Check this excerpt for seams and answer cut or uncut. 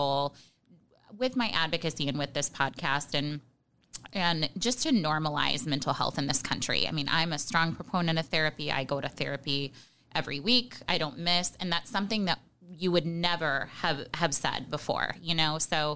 uncut